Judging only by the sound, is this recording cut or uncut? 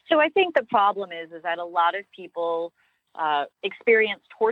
cut